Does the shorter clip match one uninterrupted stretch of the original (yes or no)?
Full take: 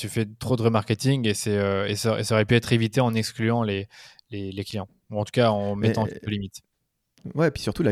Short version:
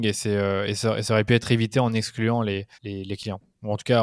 no